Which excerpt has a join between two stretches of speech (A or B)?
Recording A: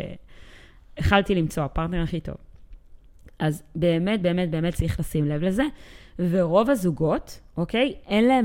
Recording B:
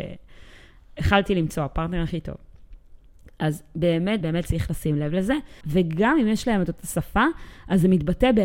B